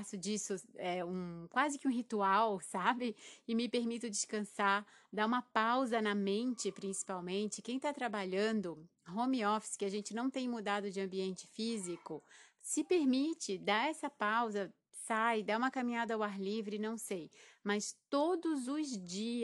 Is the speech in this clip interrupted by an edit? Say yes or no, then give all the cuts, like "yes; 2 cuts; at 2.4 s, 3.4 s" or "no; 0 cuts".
no; 0 cuts